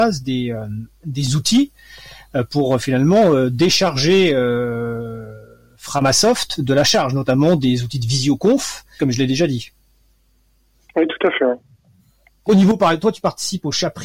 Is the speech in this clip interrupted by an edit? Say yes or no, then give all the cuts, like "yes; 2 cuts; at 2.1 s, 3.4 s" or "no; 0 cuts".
yes; 2 cuts; at 9.0 s, 12.5 s